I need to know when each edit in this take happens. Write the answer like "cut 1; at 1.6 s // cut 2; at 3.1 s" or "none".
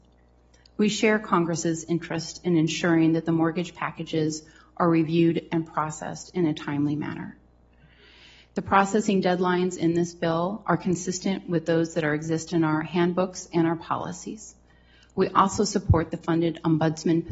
none